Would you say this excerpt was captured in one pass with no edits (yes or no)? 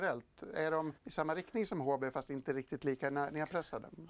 no